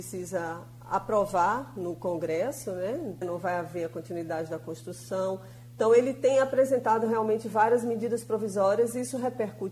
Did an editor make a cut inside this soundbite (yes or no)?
yes